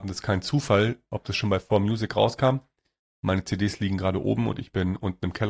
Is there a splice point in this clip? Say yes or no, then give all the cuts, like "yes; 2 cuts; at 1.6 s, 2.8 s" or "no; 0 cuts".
no; 0 cuts